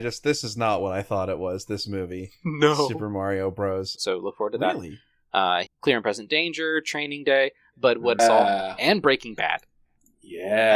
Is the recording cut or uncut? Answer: cut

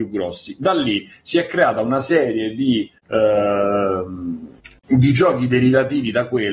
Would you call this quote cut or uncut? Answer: uncut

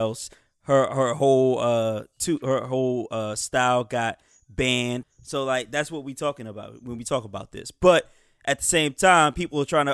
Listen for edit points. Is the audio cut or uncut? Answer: cut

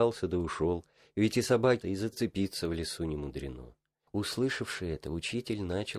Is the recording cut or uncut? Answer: cut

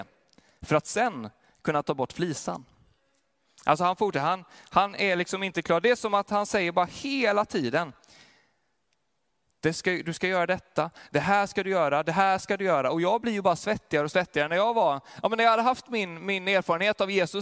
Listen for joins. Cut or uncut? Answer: uncut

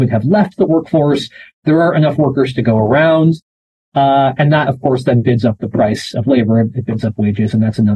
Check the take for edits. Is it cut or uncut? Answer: uncut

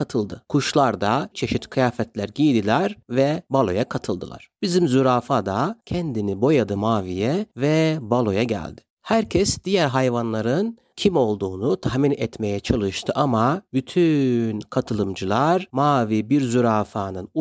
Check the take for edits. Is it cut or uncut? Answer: cut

